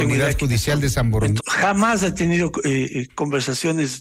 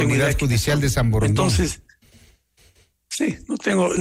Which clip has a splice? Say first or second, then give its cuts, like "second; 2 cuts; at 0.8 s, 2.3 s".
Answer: first; 1 cut; at 1.4 s